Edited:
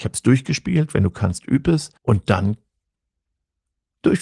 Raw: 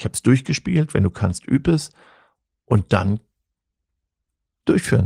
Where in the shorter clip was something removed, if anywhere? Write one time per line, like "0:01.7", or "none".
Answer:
0:02.0